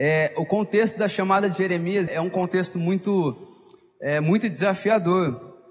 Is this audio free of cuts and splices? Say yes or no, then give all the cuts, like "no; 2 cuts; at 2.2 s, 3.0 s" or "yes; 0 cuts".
no; 1 cut; at 2.1 s